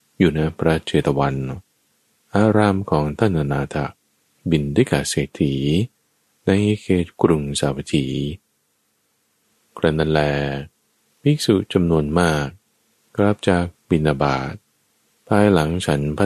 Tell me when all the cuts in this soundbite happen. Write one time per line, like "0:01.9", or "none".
none